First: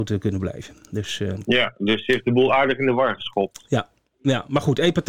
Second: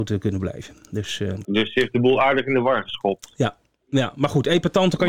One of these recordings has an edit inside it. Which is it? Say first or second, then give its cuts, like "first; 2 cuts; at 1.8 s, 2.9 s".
second; 1 cut; at 1.4 s